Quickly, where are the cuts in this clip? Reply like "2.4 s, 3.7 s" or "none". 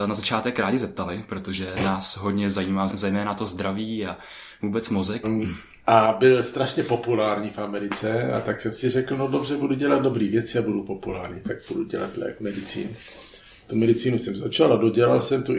2.9 s, 5.2 s